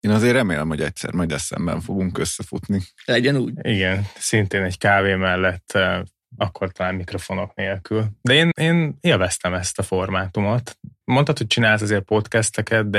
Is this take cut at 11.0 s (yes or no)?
yes